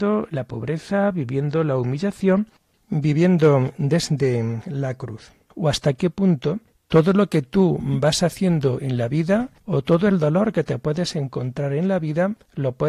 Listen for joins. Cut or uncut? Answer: cut